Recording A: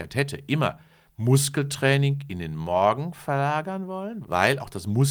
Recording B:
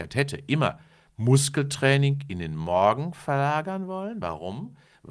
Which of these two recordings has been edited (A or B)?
A